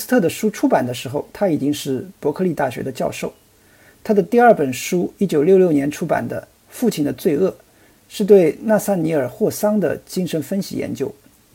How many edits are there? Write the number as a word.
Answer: zero